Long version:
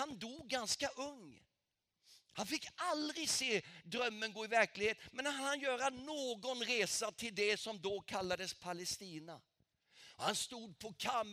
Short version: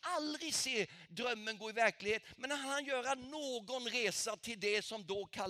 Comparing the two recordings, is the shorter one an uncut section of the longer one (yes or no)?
yes